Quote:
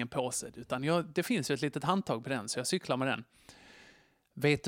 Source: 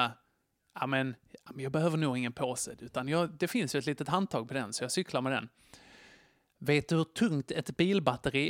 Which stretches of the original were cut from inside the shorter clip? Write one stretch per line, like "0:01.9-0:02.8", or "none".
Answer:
none